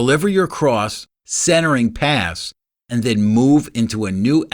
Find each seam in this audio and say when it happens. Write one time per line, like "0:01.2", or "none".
0:01.2
0:02.8